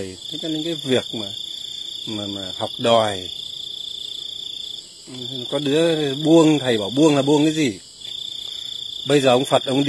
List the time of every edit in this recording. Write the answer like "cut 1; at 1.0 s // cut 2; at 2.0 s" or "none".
none